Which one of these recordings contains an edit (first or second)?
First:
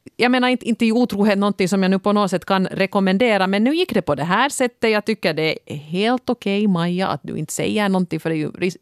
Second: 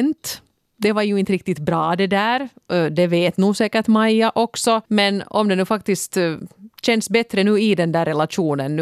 second